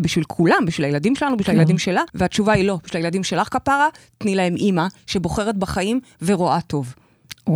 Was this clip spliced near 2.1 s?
yes; 1 cut; at 2.1 s

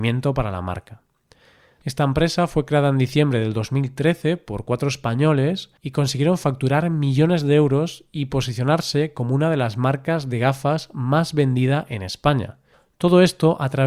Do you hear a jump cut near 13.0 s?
no; 2 cuts; at 1.8 s, 5.8 s

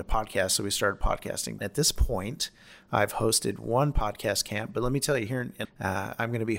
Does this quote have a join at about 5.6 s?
yes; 2 cuts; at 1.6 s, 5.6 s

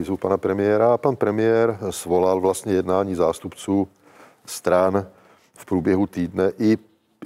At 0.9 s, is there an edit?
no; 0 cuts

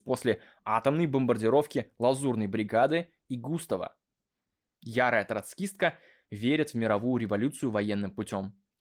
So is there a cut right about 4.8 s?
yes; 1 cut; at 4.8 s

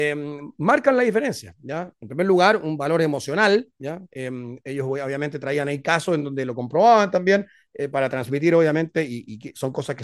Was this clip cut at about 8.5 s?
no; 2 cuts; at 1.9 s, 4.1 s

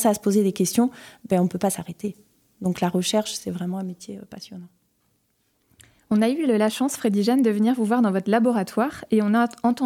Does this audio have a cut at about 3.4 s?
no; 0 cuts

